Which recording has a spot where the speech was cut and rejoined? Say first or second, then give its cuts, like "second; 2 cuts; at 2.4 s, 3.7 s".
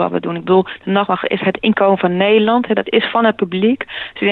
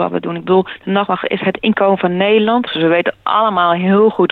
second; 1 cut; at 2.7 s